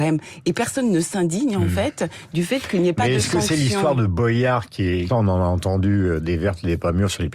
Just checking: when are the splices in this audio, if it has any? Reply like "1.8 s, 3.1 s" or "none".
5.1 s